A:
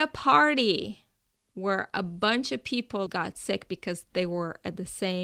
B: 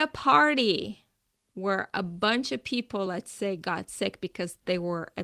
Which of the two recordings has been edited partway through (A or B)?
A